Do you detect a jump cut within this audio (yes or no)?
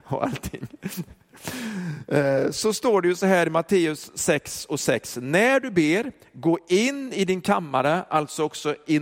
no